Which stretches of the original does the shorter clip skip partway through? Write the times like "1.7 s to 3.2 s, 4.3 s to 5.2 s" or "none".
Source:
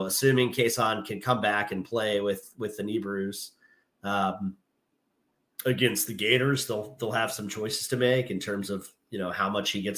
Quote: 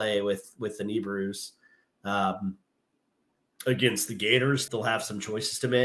6.7 s to 7.0 s